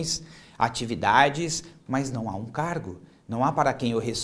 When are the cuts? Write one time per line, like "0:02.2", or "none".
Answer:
0:01.8